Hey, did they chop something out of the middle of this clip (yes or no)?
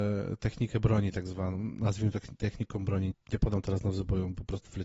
yes